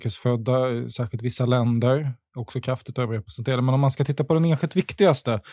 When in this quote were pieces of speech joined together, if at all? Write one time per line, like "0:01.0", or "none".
none